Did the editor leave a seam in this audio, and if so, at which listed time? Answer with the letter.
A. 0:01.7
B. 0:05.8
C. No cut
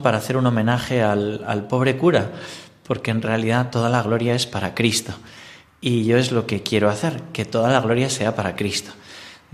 C